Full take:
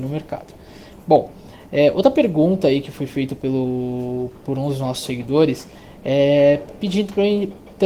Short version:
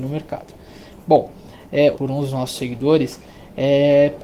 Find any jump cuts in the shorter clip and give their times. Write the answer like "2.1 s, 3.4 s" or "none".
1.9 s